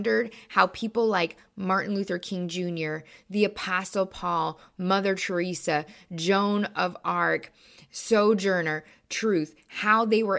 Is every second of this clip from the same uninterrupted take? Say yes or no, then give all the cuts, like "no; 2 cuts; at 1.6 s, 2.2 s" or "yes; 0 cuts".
yes; 0 cuts